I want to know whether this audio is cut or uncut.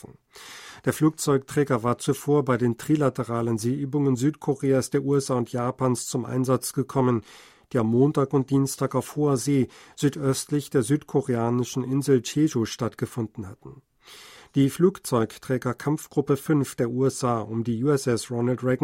uncut